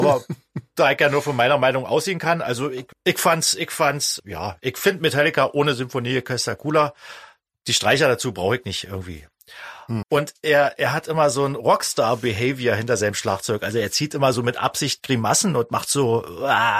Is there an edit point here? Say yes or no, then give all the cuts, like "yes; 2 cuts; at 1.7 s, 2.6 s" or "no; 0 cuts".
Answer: yes; 3 cuts; at 2.9 s, 4.2 s, 10.0 s